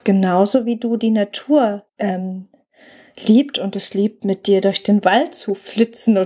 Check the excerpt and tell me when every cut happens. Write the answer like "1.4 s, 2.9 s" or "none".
1.9 s